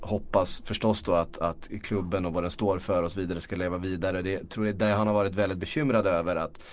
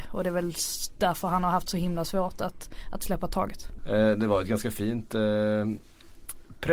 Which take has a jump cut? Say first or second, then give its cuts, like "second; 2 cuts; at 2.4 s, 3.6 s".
second; 1 cut; at 3.8 s